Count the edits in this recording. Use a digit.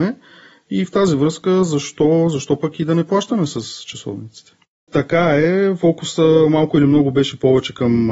1